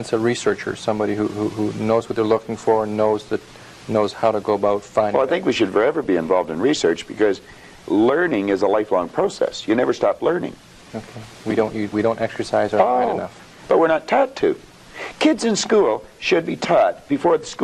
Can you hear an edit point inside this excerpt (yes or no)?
yes